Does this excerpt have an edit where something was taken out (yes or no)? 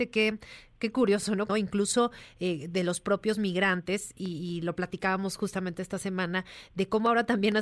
yes